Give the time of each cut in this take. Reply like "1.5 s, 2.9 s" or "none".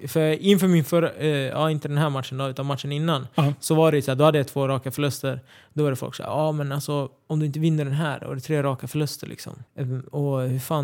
9.7 s